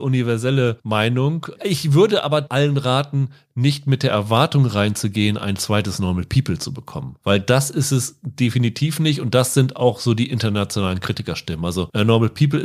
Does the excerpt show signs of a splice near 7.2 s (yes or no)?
no